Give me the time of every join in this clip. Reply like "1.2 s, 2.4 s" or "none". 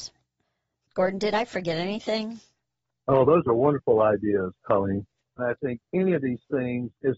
none